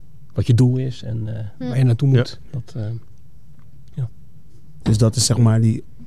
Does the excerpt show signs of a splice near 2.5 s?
yes; 2 cuts; at 2.5 s, 4.8 s

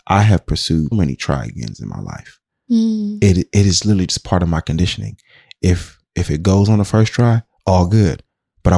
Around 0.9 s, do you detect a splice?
yes; 1 cut; at 0.9 s

